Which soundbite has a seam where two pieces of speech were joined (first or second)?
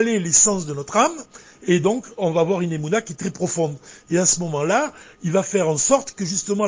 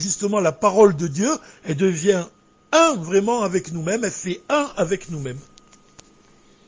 first